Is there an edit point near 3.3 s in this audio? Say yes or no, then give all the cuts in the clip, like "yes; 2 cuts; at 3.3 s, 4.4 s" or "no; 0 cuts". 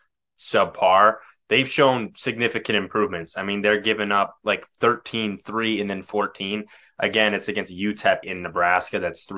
no; 1 cut; at 8.2 s